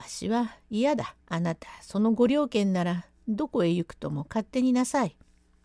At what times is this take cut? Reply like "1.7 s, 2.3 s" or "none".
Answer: 1.2 s